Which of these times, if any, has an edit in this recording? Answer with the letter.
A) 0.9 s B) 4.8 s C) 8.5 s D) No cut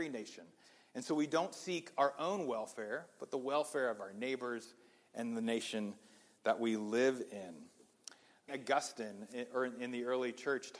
C